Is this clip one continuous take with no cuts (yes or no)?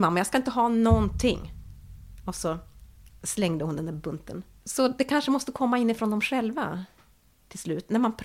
yes